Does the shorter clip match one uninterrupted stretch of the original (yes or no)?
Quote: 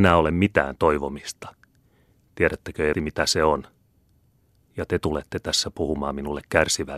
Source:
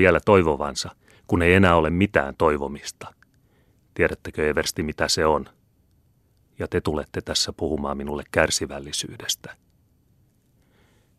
no